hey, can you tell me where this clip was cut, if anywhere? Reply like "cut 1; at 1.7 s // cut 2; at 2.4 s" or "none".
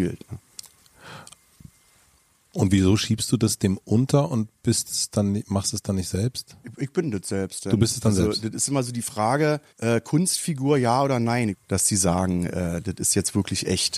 cut 1; at 9.7 s // cut 2; at 11.5 s